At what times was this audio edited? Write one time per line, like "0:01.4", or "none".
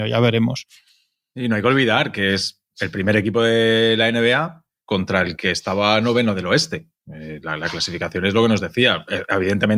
none